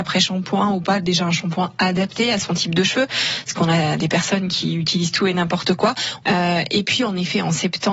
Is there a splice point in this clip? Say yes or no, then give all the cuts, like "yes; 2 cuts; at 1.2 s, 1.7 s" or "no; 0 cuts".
yes; 1 cut; at 6.2 s